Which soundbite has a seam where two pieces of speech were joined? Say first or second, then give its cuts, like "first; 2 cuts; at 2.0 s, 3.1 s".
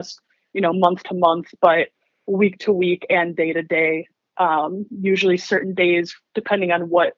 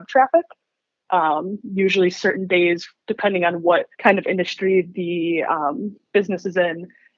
second; 2 cuts; at 1.0 s, 3.9 s